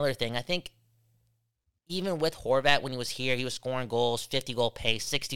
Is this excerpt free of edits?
yes; 0 cuts

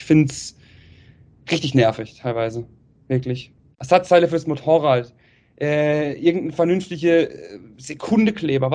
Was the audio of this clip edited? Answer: yes; 1 cut; at 3.7 s

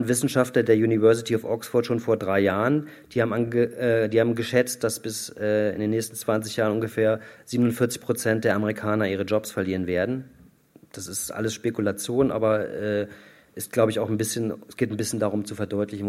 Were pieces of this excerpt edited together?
no; 0 cuts

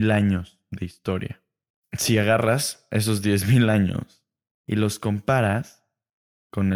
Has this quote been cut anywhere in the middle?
no; 0 cuts

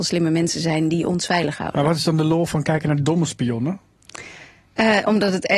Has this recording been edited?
no; 0 cuts

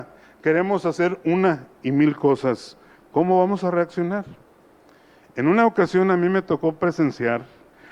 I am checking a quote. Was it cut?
no; 0 cuts

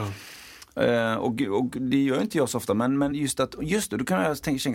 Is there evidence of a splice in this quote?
no; 0 cuts

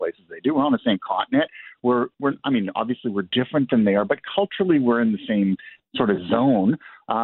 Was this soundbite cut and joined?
no; 0 cuts

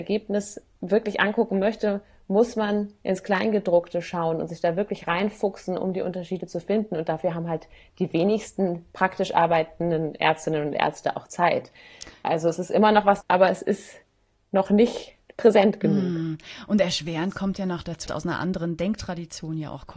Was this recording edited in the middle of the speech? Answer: yes; 2 cuts; at 13.2 s, 18.1 s

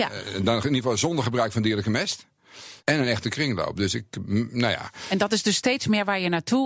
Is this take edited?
yes; 1 cut; at 2.8 s

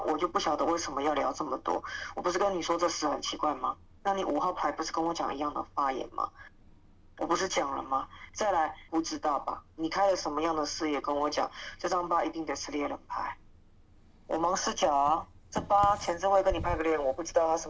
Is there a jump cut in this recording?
yes; 1 cut; at 8.9 s

